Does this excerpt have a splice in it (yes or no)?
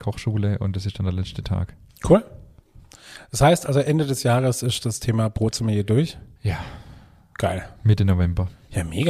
no